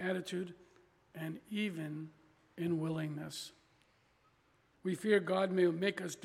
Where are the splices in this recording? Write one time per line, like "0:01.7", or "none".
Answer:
0:04.7